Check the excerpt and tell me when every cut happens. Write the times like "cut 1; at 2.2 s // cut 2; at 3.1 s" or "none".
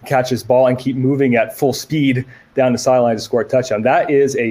none